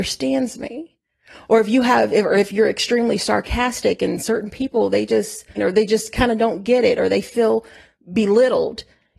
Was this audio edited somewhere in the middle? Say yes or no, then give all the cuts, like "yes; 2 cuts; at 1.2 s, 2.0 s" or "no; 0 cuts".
yes; 1 cut; at 5.6 s